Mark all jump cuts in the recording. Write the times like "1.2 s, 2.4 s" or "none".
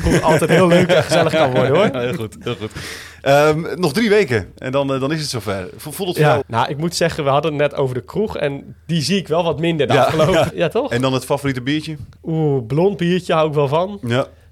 6.4 s, 10.5 s, 12.2 s